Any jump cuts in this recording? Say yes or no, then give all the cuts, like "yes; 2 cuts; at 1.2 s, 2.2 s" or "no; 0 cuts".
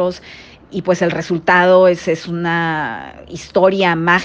no; 0 cuts